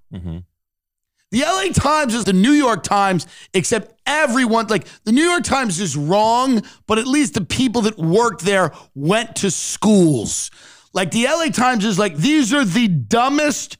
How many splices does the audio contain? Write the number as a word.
one